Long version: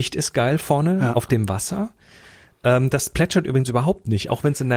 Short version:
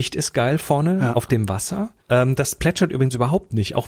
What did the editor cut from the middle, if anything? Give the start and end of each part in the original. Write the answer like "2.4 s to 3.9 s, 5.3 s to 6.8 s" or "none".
2.0 s to 2.5 s